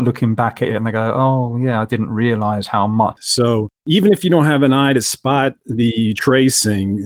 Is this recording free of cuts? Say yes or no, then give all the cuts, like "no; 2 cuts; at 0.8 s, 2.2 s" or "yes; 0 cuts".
no; 1 cut; at 3.2 s